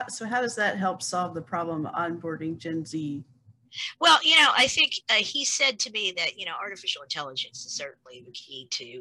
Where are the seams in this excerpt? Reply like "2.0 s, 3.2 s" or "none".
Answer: none